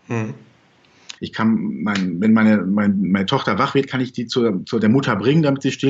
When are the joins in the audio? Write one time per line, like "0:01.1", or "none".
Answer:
0:01.2